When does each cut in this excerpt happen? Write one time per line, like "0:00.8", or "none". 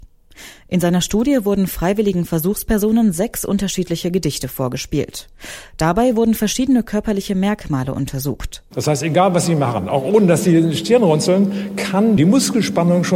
0:08.7